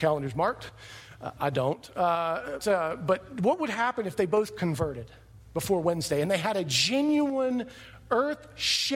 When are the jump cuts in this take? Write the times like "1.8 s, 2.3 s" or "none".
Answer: 2.6 s